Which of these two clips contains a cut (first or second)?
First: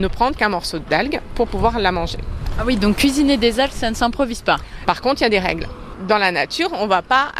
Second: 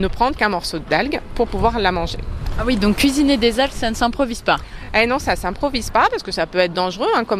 first